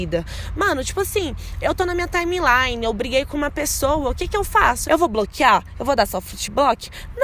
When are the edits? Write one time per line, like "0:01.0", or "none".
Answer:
0:04.8